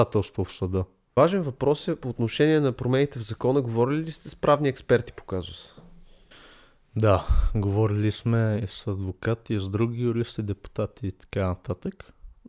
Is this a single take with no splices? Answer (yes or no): yes